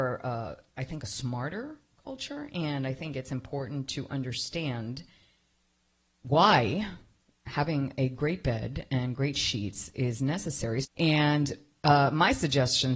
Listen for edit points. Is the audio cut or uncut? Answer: cut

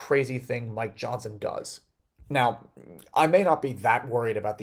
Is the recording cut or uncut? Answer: uncut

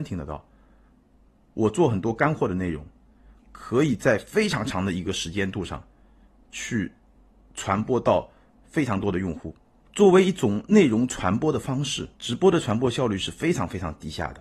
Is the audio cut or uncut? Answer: cut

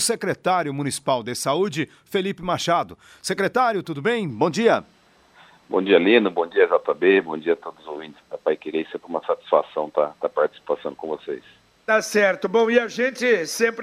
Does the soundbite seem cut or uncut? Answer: cut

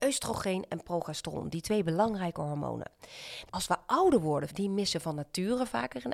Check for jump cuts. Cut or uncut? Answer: cut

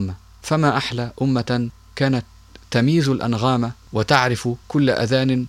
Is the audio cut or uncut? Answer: uncut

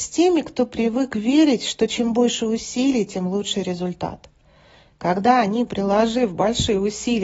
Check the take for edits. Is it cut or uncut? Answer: uncut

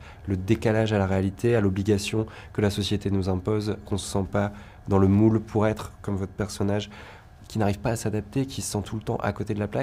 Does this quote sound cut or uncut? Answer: cut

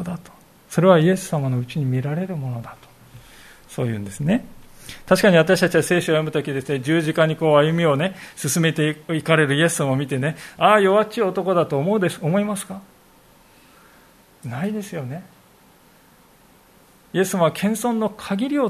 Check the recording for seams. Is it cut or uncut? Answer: uncut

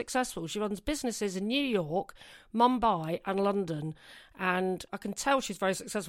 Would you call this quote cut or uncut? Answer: uncut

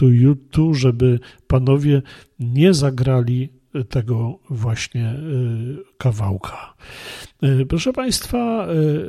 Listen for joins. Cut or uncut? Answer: uncut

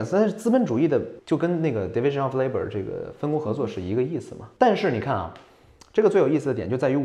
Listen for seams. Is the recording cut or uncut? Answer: cut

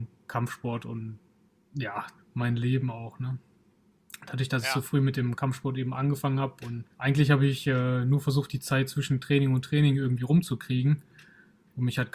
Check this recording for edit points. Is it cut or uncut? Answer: cut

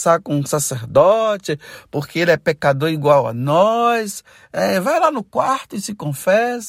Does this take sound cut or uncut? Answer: uncut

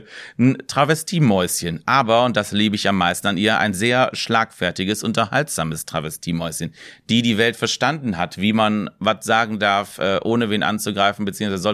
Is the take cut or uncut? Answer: uncut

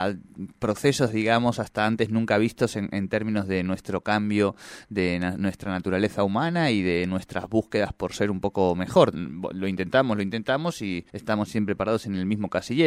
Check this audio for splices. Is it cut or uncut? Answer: cut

